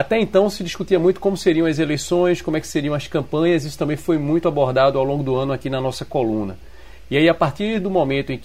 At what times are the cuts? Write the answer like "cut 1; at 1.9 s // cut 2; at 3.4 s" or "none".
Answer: none